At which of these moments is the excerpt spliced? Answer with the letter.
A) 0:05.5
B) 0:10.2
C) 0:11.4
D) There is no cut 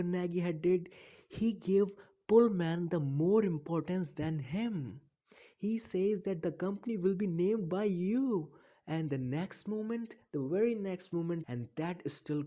C